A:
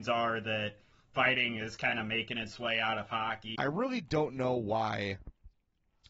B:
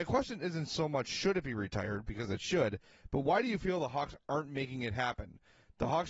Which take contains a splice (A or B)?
A